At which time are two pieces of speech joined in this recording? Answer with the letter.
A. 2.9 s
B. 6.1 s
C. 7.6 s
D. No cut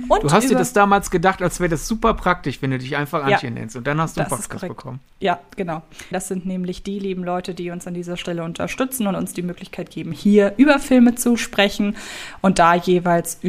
B